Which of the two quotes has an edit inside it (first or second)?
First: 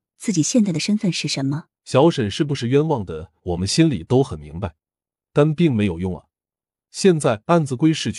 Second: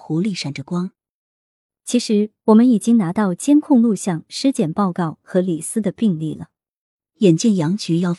first